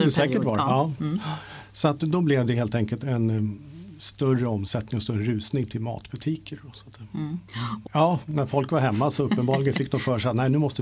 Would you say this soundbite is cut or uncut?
cut